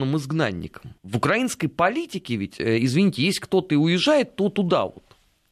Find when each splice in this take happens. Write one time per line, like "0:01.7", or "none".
0:01.0